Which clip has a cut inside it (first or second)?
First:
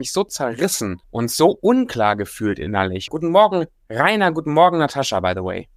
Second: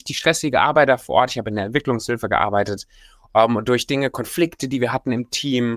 first